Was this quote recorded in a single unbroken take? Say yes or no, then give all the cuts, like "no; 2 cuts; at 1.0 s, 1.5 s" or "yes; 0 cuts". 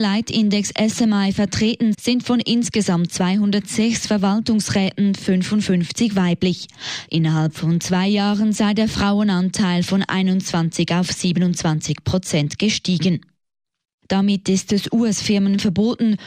no; 3 cuts; at 1.9 s, 7.1 s, 14.0 s